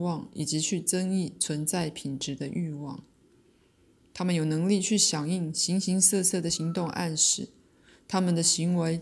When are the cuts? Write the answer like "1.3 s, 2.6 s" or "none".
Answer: none

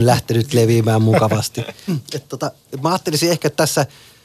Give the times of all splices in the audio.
1.9 s

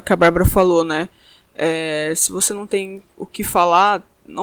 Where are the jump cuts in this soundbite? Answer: none

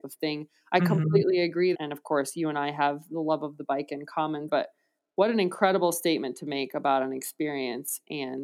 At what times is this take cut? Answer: 1.7 s, 4.5 s

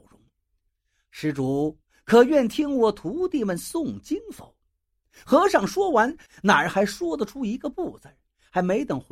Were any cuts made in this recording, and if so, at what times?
6.3 s

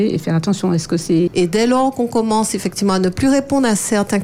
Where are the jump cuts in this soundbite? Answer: 1.3 s

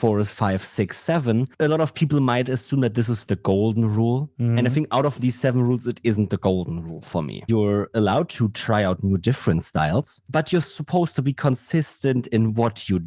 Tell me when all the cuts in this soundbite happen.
7.5 s, 10.6 s

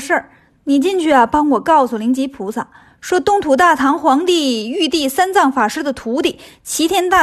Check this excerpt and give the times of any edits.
none

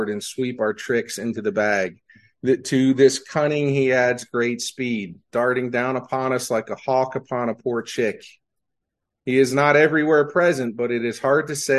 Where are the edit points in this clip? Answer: 5.3 s

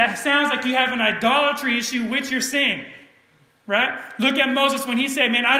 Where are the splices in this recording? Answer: none

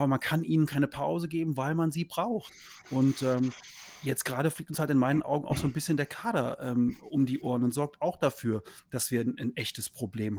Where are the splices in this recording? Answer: none

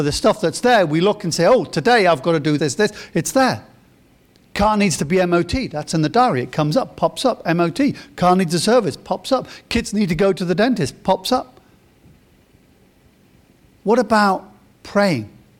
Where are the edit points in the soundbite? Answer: 2.6 s

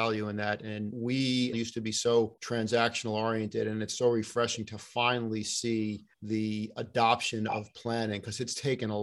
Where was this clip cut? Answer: 1.5 s, 6.1 s

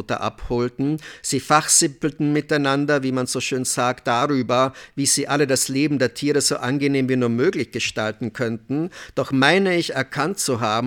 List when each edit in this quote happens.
none

